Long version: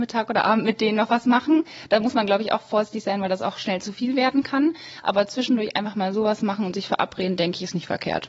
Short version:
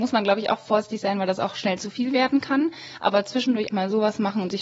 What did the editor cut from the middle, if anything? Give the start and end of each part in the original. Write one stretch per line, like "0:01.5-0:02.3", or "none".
0:05.7-0:05.9